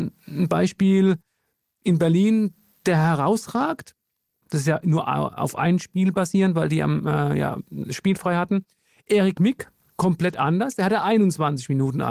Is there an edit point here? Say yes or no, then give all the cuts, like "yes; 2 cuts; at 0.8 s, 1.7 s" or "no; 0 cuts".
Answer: yes; 1 cut; at 4.4 s